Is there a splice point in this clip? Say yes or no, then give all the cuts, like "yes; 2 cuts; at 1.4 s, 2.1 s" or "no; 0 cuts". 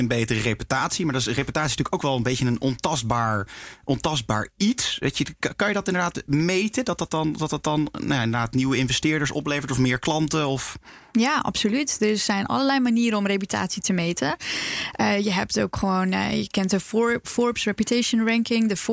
no; 0 cuts